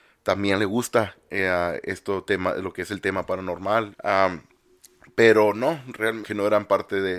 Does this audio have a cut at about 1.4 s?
no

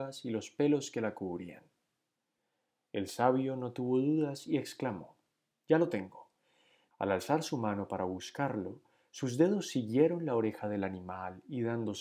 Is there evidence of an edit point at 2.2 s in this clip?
no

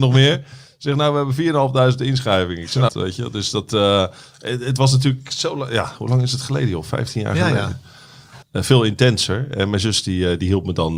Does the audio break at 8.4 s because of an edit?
yes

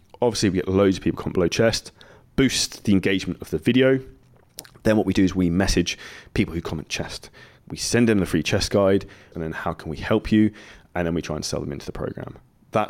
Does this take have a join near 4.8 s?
no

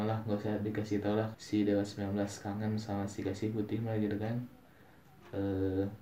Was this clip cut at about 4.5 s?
no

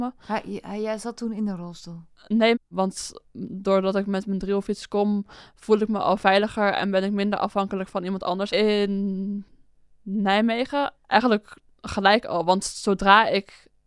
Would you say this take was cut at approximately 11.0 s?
yes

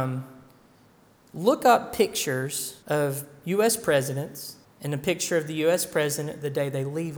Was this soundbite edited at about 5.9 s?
no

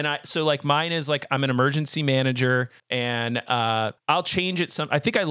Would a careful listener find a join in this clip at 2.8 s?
yes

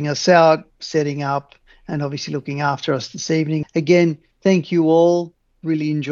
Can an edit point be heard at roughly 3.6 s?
yes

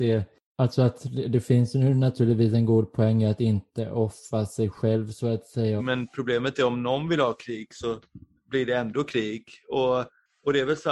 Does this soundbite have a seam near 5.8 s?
yes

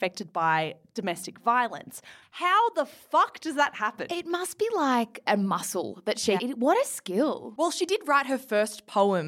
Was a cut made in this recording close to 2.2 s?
yes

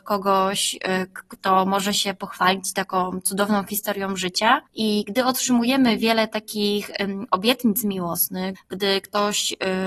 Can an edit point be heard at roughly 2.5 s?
no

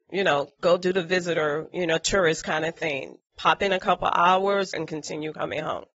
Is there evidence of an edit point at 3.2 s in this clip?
no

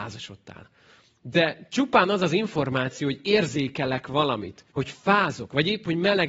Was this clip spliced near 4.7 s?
yes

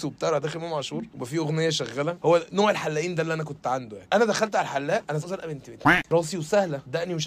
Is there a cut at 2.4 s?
no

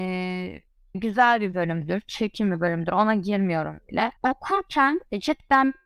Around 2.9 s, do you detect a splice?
no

